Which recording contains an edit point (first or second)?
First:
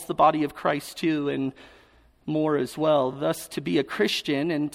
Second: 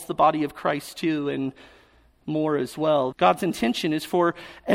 second